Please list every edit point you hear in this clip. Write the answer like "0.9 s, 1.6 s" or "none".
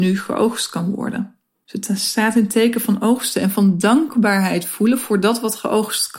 none